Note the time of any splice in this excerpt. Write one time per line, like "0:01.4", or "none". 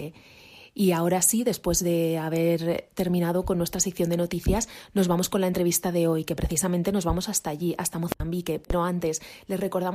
none